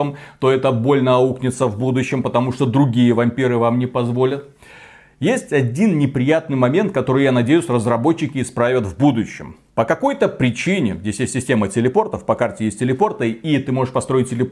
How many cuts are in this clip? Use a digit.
0